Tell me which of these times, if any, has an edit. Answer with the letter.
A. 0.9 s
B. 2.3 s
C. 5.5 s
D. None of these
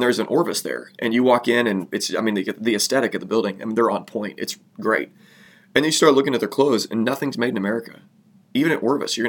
D